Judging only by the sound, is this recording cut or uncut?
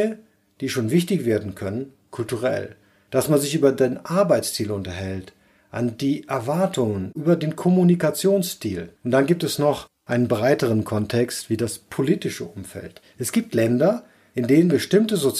cut